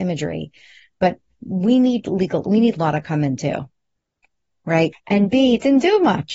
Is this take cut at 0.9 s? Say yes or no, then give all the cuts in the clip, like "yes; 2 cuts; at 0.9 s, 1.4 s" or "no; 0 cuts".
no; 1 cut; at 4.9 s